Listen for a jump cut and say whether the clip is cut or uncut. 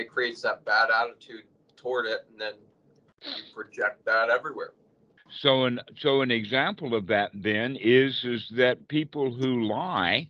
cut